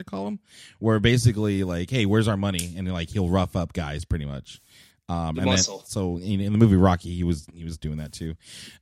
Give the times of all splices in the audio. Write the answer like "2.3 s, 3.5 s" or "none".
5.8 s